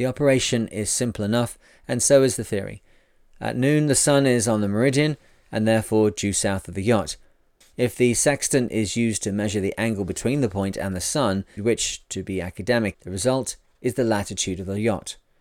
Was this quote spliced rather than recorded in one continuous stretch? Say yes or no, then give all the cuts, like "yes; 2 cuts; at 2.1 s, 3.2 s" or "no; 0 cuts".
yes; 3 cuts; at 7.6 s, 11.6 s, 12.9 s